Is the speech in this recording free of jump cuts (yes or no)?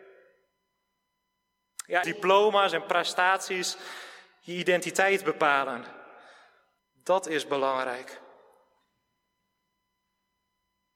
no